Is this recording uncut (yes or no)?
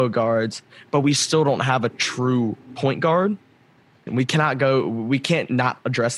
no